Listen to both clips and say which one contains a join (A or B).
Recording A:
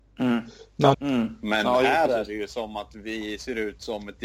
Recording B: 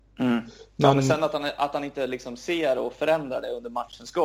A